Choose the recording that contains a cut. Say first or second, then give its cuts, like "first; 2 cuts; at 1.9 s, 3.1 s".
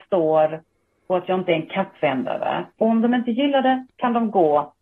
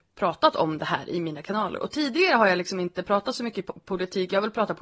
first; 1 cut; at 2.8 s